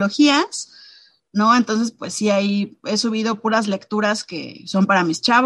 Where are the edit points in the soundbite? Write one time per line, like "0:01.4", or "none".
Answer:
none